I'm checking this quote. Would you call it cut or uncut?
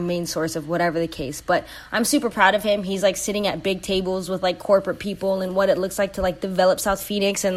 uncut